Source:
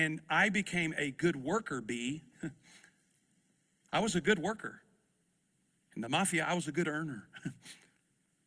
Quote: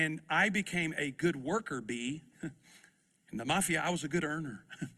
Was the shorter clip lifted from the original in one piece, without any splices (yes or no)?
no